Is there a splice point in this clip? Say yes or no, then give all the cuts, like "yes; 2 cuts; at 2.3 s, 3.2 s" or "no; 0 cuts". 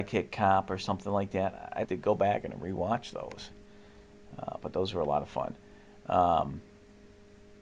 yes; 1 cut; at 1.8 s